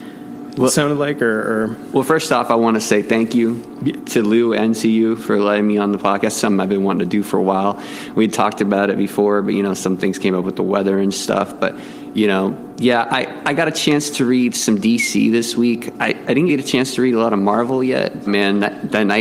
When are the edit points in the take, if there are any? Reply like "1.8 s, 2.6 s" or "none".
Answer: 16.5 s, 18.3 s